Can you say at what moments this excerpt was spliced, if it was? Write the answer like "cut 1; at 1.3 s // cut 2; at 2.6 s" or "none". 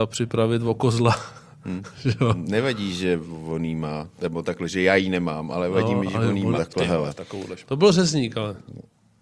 cut 1; at 6.6 s // cut 2; at 7.6 s